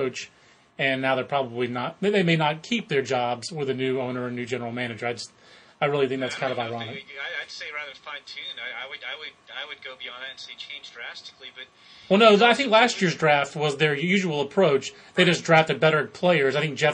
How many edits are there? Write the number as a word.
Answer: zero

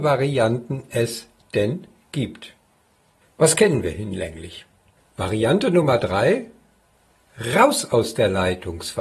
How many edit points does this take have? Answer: one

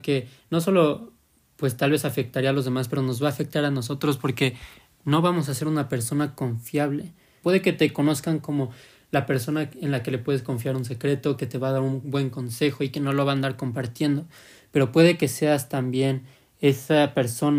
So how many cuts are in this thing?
one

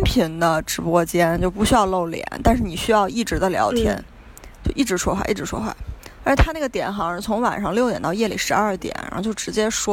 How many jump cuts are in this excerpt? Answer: zero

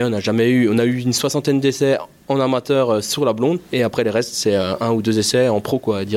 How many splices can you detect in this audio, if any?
one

